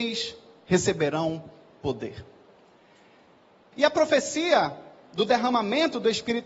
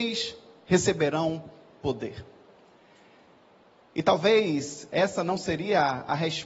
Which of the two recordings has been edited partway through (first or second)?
first